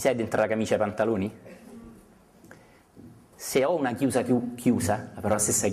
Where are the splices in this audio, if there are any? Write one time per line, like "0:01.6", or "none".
none